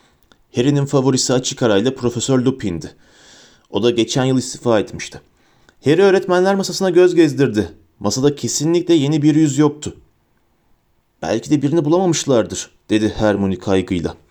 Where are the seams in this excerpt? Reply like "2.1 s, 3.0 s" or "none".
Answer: none